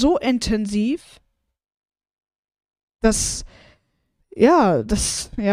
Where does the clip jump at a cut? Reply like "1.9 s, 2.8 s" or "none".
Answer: none